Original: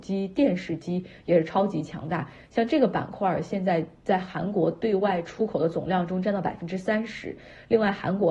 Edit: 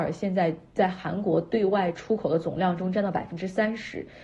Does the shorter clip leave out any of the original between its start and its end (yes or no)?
no